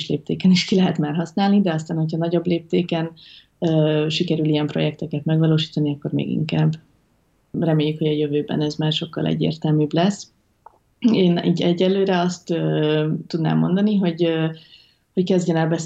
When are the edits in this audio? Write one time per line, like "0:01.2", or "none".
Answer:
0:07.5